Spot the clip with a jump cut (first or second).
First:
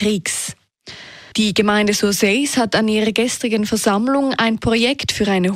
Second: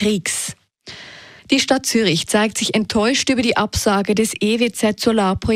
first